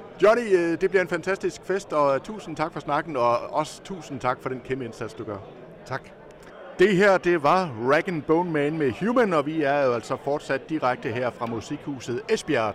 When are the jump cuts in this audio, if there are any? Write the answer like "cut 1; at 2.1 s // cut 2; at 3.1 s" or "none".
none